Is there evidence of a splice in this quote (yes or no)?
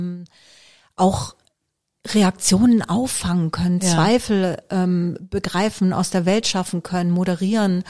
no